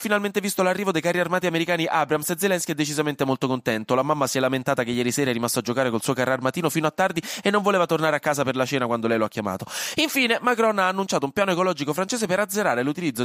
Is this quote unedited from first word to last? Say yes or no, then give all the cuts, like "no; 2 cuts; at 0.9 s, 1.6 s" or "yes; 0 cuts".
yes; 0 cuts